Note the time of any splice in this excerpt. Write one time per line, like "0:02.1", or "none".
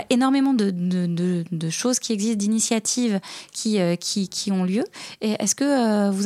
none